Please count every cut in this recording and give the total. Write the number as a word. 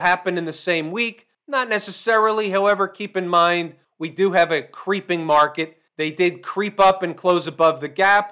one